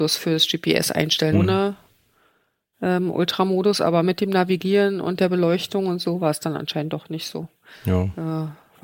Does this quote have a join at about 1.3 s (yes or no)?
yes